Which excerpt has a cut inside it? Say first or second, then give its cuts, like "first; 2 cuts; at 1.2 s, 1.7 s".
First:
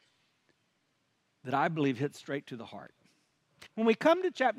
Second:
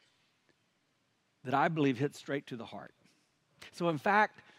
first; 1 cut; at 3.7 s